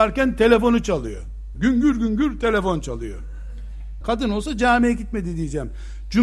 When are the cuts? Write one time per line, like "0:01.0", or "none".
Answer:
0:01.5
0:04.0